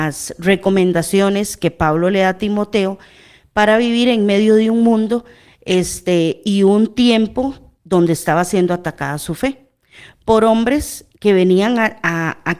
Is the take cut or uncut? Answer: cut